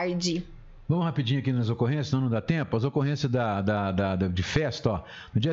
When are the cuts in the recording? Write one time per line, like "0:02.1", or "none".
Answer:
none